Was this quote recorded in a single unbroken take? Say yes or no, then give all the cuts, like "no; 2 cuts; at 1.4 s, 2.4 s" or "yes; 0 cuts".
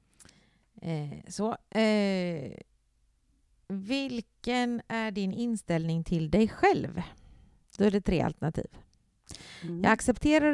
yes; 0 cuts